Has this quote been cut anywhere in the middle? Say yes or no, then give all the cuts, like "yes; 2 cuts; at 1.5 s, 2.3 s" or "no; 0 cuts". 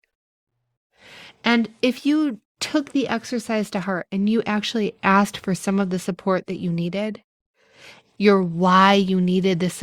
yes; 2 cuts; at 1.4 s, 8.1 s